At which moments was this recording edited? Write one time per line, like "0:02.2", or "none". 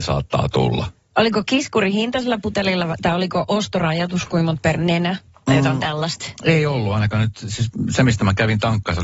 none